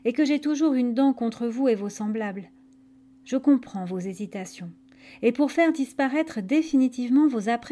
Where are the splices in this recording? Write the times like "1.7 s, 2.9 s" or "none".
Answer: none